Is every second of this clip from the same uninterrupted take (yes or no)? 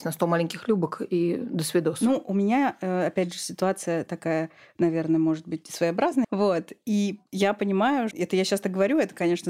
no